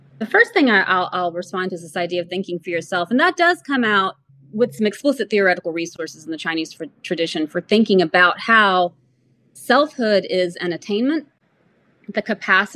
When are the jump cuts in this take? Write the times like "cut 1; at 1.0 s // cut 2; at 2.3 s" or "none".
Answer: none